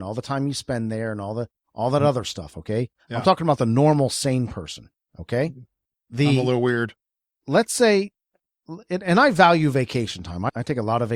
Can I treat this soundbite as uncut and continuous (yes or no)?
yes